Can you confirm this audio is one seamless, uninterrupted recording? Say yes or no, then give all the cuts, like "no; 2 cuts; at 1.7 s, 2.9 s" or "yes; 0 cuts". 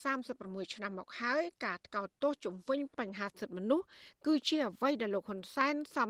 yes; 0 cuts